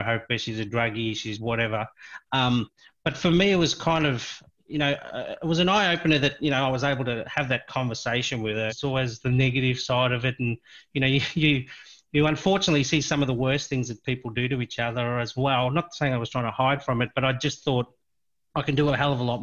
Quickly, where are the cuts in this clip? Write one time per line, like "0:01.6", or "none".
0:08.7